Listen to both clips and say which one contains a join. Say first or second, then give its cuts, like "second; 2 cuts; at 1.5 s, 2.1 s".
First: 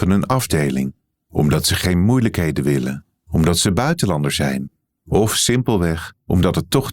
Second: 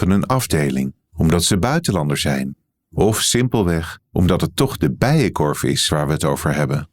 second; 1 cut; at 1.1 s